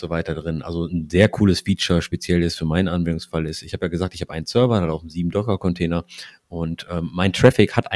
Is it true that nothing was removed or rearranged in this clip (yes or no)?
yes